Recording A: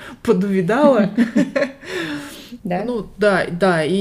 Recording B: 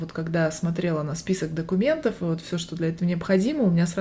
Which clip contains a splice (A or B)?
A